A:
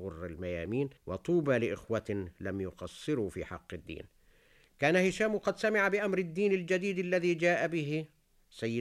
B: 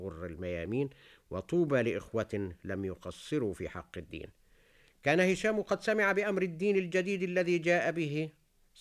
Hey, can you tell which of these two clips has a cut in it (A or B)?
A